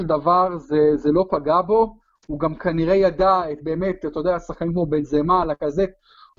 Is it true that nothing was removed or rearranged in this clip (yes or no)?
yes